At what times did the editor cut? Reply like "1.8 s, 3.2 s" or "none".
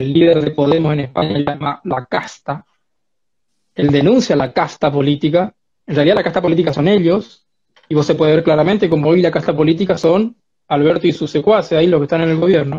none